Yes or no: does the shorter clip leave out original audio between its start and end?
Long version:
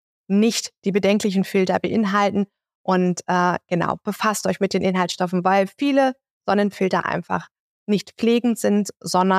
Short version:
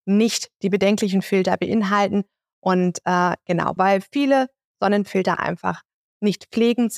yes